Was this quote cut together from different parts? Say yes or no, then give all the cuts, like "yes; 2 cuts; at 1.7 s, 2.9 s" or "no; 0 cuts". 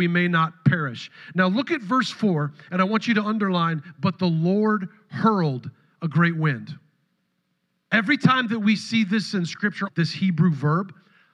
yes; 2 cuts; at 7.8 s, 9.9 s